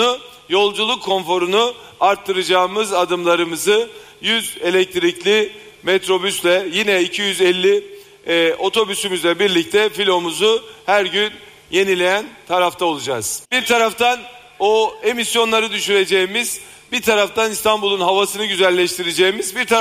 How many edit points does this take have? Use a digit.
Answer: 1